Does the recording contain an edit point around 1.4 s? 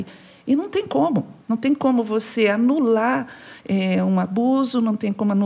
yes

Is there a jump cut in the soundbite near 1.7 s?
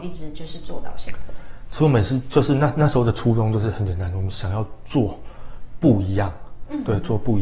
no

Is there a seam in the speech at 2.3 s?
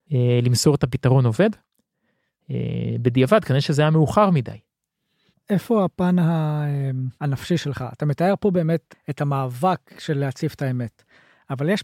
no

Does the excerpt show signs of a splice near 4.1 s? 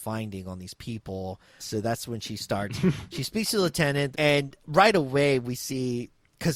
yes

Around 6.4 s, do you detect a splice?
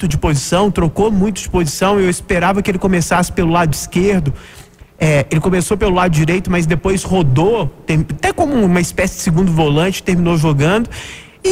no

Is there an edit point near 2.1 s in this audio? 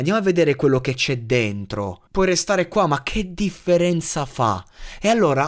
yes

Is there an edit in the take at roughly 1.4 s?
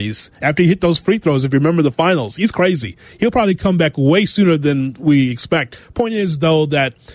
no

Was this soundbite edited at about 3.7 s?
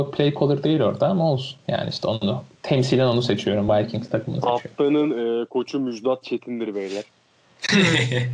no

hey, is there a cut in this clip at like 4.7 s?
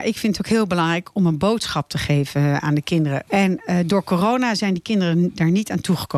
no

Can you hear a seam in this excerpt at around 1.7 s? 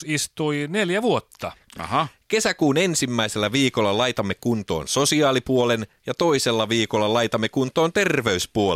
yes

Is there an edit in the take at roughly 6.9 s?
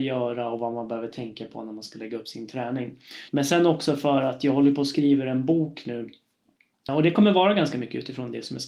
yes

